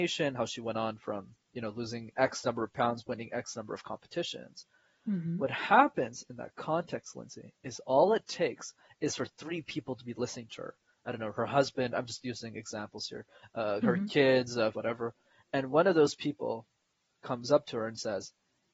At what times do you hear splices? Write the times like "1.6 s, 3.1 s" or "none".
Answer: 14.7 s